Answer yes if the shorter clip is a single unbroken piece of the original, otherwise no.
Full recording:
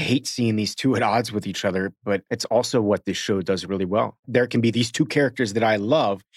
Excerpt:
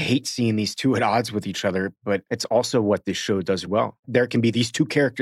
no